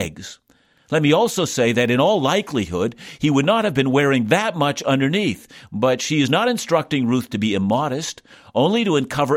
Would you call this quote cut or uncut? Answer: uncut